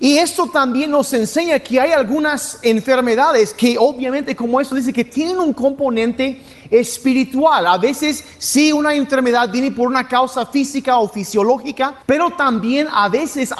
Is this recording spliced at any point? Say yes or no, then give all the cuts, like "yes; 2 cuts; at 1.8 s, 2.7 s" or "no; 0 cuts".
yes; 1 cut; at 12.0 s